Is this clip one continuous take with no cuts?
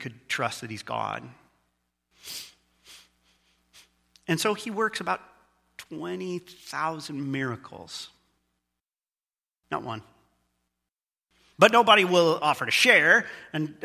no; 1 cut; at 11.5 s

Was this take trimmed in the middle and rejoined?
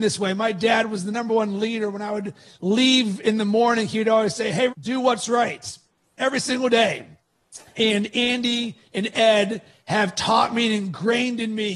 yes; 1 cut; at 4.7 s

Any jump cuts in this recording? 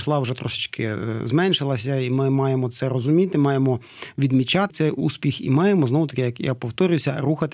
yes; 1 cut; at 4.7 s

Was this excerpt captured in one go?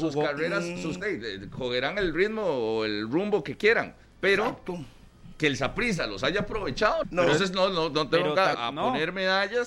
no; 3 cuts; at 1.0 s, 7.0 s, 8.5 s

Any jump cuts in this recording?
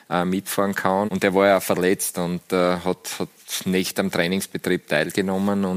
yes; 1 cut; at 1.1 s

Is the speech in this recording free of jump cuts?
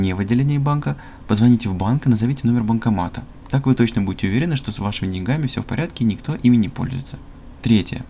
no; 1 cut; at 3.4 s

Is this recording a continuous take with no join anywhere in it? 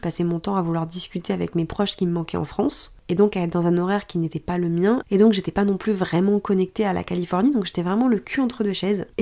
yes; 0 cuts

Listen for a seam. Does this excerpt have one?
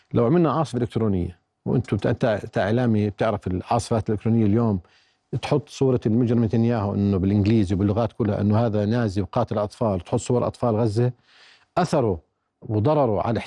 no; 0 cuts

